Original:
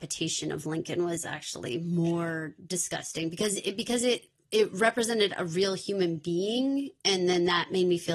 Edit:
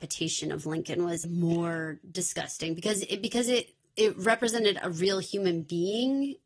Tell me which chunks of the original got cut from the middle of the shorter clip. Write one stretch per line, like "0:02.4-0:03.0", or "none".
0:01.2-0:01.8